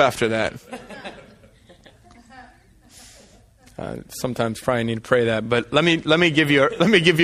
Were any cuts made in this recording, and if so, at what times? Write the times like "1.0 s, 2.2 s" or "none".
none